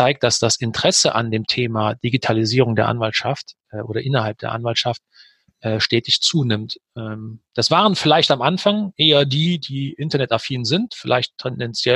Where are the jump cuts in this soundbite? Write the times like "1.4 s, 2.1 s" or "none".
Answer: none